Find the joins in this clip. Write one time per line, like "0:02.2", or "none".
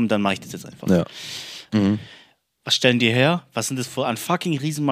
0:01.7